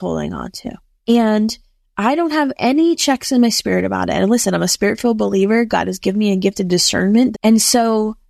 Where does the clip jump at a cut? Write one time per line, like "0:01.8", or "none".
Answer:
0:01.0
0:07.3